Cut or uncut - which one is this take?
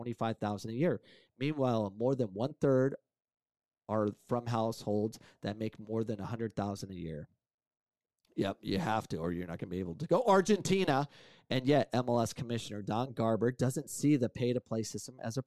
uncut